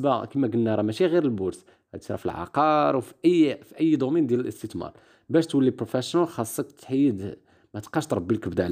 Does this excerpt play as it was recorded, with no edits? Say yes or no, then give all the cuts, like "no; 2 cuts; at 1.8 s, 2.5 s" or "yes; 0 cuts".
yes; 0 cuts